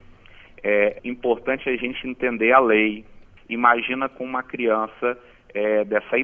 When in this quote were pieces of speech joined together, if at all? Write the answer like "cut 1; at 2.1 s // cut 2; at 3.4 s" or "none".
cut 1; at 1.0 s // cut 2; at 3.4 s